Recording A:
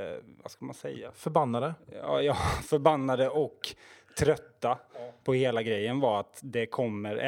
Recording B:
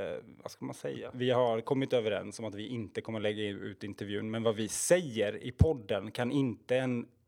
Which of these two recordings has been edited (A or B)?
B